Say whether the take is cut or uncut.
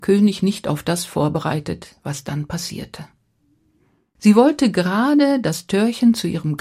uncut